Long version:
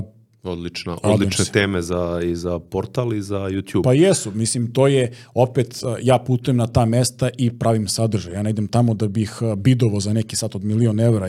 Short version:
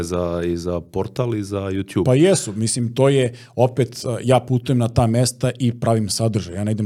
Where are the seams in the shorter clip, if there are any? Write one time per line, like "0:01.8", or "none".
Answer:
none